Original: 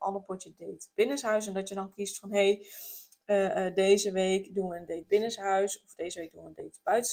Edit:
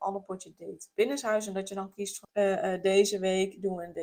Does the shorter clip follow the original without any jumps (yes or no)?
no